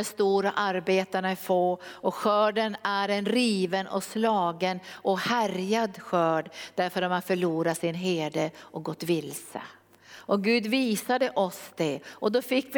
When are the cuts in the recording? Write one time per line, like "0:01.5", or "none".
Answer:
none